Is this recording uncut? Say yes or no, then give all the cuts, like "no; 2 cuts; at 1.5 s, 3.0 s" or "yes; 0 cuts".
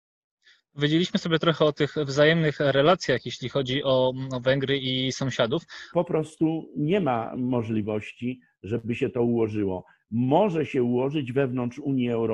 no; 1 cut; at 5.9 s